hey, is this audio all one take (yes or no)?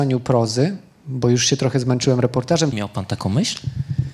no